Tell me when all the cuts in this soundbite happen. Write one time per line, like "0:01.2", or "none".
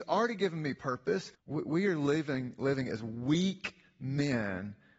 0:01.3